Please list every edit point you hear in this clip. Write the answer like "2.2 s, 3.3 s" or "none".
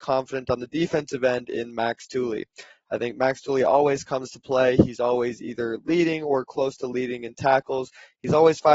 none